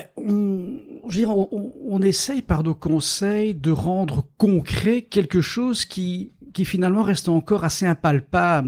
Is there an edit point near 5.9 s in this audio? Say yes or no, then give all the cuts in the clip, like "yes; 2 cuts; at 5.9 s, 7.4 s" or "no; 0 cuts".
no; 0 cuts